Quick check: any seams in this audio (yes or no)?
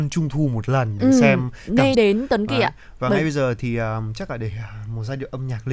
yes